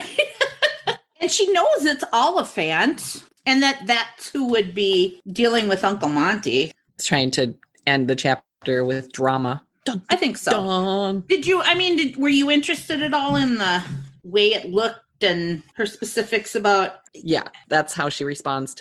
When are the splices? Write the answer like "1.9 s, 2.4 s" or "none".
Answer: 7.0 s, 17.1 s